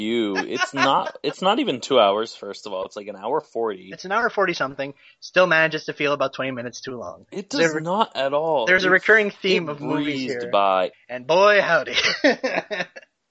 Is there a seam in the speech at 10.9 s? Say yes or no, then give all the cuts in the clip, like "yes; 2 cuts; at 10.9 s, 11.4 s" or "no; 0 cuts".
yes; 1 cut; at 10.9 s